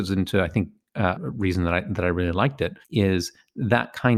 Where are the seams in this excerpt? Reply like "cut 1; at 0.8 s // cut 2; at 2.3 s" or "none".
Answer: cut 1; at 1.1 s // cut 2; at 2.8 s